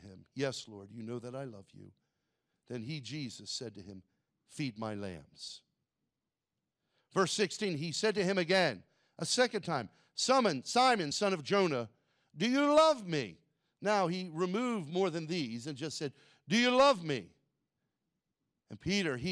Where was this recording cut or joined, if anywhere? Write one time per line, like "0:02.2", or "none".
none